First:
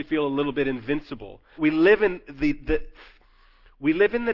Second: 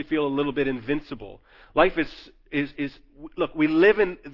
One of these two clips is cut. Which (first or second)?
first